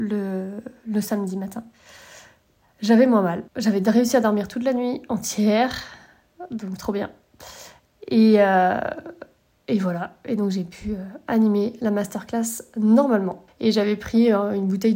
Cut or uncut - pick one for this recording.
cut